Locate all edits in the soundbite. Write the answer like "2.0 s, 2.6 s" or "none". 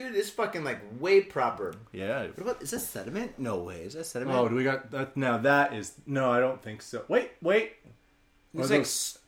none